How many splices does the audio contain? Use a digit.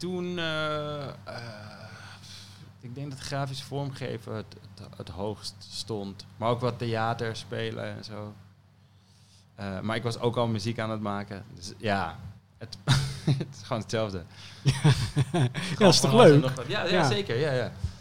0